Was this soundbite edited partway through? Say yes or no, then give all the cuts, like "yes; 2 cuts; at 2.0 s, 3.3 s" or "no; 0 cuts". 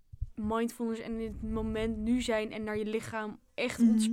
no; 0 cuts